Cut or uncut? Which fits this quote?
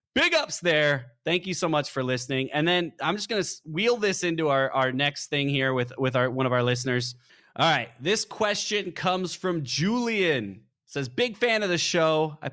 uncut